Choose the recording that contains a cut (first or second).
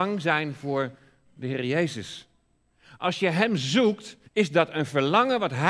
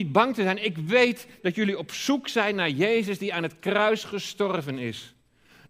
first